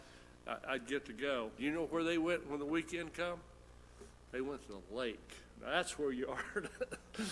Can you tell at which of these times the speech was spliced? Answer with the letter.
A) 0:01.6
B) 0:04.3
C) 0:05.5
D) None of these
A